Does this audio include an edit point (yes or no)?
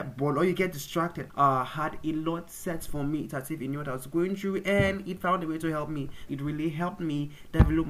yes